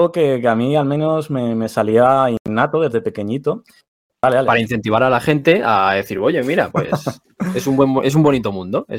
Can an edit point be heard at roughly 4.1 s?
yes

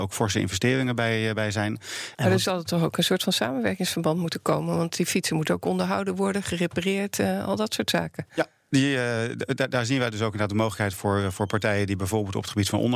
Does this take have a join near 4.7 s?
no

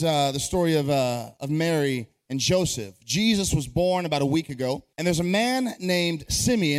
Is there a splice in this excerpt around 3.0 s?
no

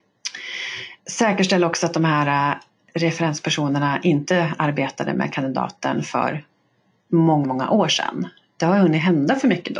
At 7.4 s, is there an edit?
yes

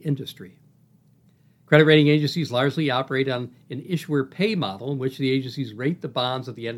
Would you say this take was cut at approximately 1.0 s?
no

